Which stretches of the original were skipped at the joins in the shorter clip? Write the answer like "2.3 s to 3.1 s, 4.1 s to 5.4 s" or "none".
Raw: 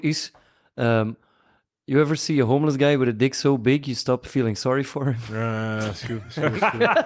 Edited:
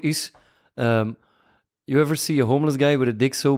none